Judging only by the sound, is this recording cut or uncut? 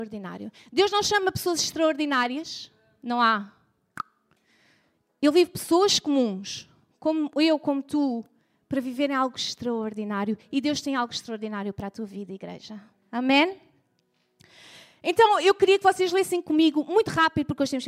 uncut